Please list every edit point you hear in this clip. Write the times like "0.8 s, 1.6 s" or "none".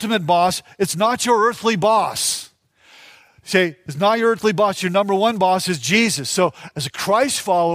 none